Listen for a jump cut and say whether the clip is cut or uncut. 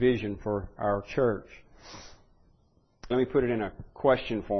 cut